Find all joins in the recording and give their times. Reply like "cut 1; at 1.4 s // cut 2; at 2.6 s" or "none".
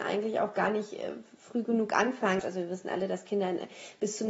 cut 1; at 2.4 s